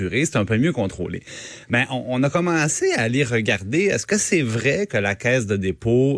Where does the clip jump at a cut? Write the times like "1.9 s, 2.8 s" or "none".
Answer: none

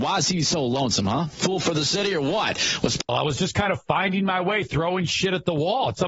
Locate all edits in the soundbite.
3.1 s

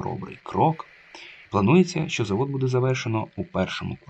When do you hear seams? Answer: 1.5 s

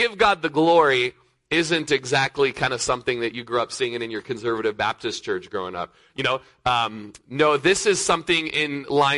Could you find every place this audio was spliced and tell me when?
6.1 s

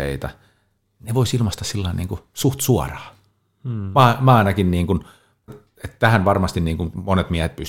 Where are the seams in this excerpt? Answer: 5.5 s

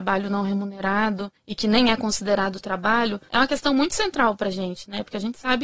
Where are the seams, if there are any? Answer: none

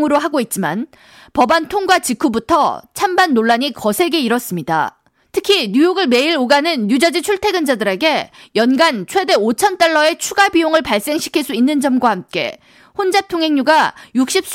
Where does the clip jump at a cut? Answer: none

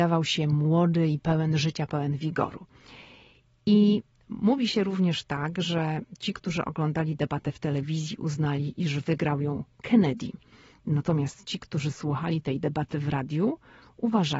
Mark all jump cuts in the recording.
none

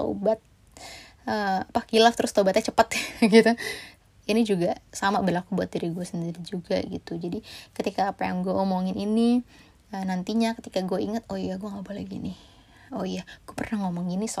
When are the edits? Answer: none

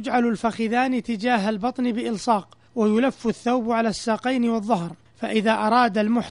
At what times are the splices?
2.7 s

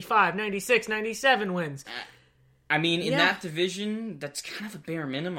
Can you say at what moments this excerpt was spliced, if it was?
none

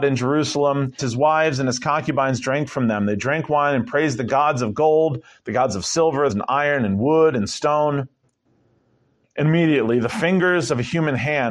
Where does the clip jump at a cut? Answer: 1.0 s, 6.3 s

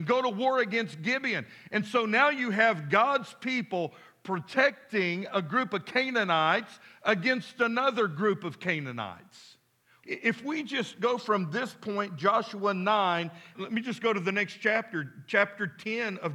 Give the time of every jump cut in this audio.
10.0 s, 13.5 s

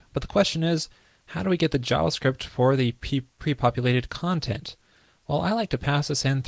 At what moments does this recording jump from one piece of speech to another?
none

